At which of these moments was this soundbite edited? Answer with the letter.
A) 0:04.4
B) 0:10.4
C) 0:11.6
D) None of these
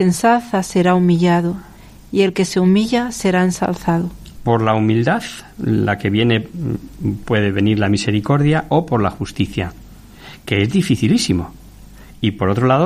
A